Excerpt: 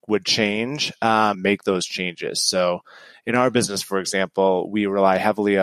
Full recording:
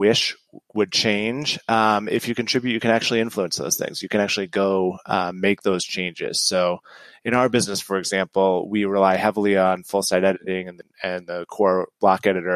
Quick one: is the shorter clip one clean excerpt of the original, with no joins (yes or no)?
no